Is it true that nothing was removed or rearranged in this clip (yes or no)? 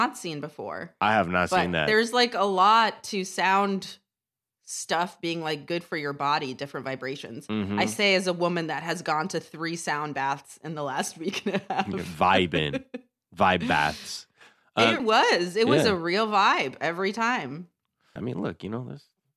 no